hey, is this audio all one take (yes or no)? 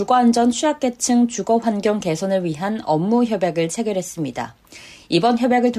yes